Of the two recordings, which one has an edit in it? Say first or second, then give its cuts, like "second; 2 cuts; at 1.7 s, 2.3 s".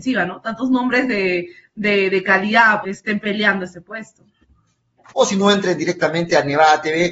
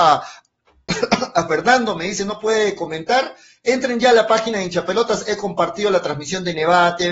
first; 2 cuts; at 2.8 s, 5.1 s